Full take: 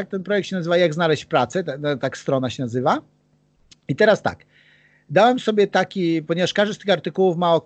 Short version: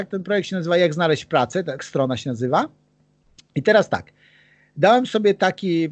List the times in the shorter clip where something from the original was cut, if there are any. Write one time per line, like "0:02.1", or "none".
0:01.8